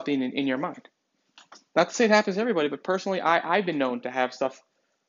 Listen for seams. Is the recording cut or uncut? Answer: uncut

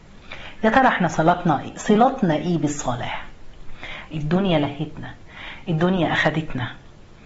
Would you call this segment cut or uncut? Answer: cut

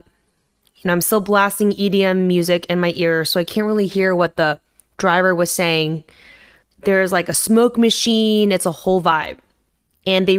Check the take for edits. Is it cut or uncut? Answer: cut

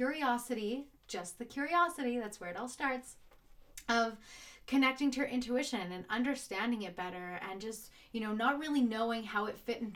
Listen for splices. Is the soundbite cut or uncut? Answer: uncut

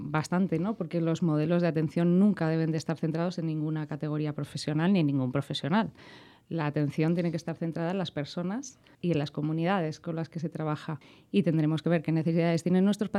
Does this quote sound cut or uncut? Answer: uncut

